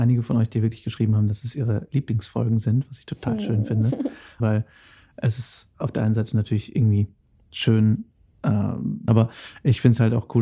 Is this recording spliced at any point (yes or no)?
yes